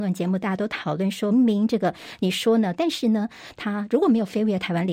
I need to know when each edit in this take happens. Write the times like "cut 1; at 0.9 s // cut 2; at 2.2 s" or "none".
cut 1; at 1.3 s // cut 2; at 2.7 s